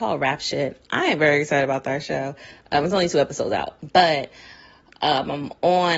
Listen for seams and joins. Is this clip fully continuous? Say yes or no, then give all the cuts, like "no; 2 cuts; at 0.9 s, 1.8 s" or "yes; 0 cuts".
yes; 0 cuts